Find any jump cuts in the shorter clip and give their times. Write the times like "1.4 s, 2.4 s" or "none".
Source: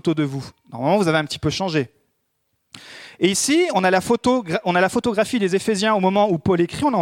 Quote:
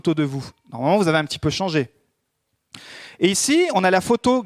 none